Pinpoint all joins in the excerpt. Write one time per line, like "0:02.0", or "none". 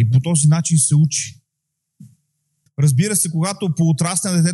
0:02.7